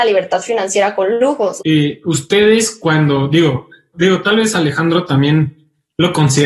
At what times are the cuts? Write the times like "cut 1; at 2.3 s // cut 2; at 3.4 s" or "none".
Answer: cut 1; at 1.6 s // cut 2; at 3.9 s